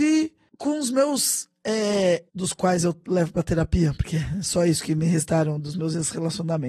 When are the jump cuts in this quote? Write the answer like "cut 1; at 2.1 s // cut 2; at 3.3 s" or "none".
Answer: cut 1; at 2.3 s